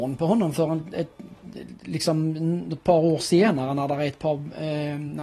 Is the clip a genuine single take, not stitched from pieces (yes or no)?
yes